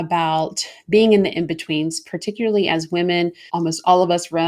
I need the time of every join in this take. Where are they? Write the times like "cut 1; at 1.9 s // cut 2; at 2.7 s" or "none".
cut 1; at 3.5 s